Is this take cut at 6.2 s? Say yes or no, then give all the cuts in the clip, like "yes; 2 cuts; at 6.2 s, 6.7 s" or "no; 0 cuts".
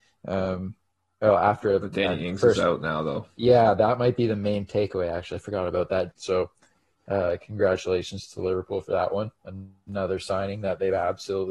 yes; 1 cut; at 6.2 s